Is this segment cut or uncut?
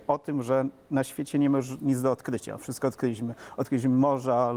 uncut